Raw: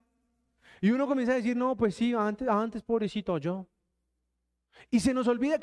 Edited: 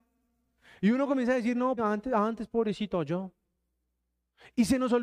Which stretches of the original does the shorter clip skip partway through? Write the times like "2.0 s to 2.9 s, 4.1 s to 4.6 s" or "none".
1.8 s to 2.1 s